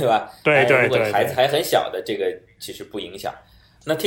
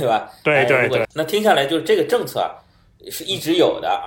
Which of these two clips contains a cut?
second; 1 cut; at 1.0 s

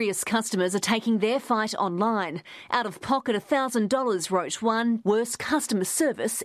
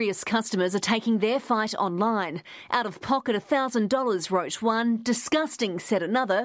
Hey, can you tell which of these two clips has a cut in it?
first; 1 cut; at 5.0 s

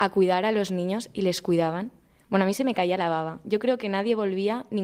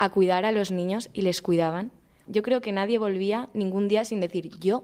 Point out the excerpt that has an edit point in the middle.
second; 1 cut; at 2.3 s

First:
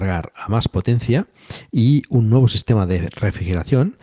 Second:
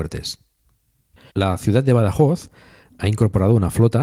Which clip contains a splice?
second; 1 cut; at 1.3 s

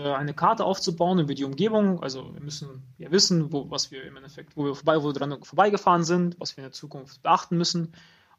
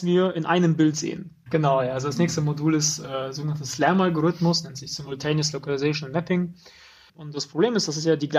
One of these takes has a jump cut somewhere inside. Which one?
second; 2 cuts; at 1.5 s, 7.1 s

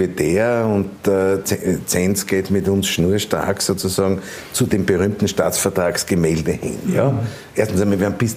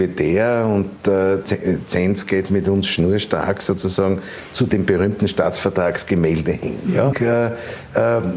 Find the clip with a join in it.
second; 1 cut; at 7.1 s

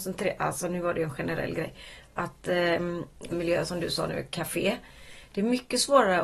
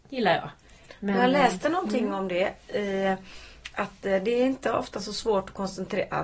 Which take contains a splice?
first; 1 cut; at 3.3 s

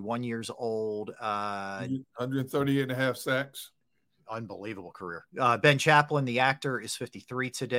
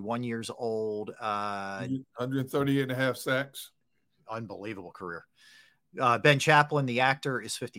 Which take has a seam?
first; 1 cut; at 5.3 s

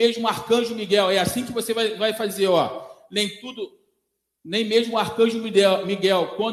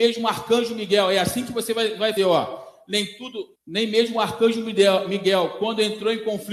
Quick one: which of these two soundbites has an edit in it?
second; 2 cuts; at 2.2 s, 3.6 s

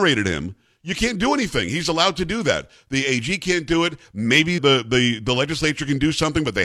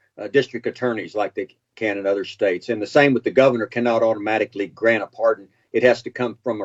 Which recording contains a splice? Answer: first; 1 cut; at 4.6 s

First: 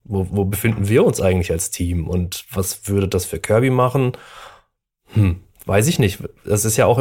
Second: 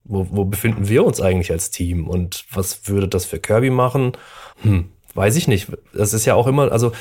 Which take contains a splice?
second; 1 cut; at 4.5 s

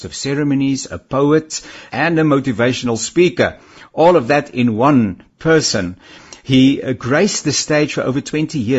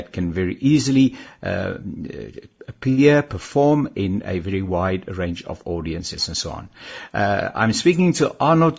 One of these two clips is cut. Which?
first; 1 cut; at 1.9 s

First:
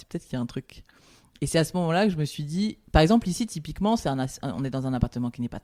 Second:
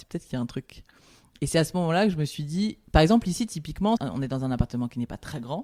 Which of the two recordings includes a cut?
second; 1 cut; at 4.0 s

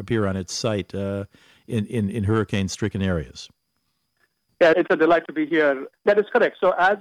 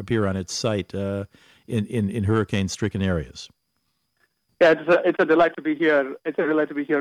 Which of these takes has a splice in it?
first; 2 cuts; at 4.7 s, 5.9 s

